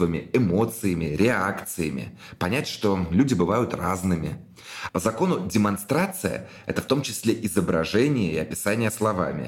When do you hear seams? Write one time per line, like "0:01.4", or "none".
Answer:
0:04.9